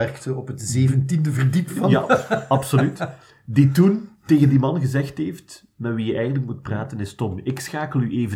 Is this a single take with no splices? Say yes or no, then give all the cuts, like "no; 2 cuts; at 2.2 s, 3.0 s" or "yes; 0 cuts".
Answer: yes; 0 cuts